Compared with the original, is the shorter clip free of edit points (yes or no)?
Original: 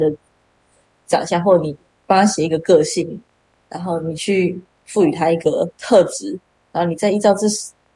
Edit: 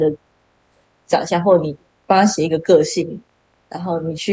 yes